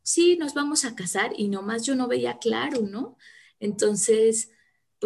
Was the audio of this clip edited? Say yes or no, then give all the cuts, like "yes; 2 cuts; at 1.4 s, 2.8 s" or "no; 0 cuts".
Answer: yes; 1 cut; at 3.4 s